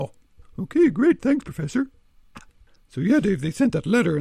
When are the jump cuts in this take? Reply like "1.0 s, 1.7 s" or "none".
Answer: 2.3 s